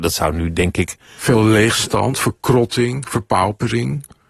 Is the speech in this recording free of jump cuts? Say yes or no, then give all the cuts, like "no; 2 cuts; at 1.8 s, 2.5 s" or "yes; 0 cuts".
yes; 0 cuts